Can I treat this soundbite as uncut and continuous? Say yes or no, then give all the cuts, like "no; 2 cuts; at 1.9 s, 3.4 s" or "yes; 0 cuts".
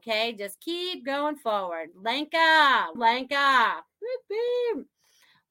no; 1 cut; at 3.0 s